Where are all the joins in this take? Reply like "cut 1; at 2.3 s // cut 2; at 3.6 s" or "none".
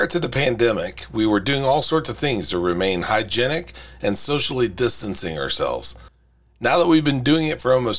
none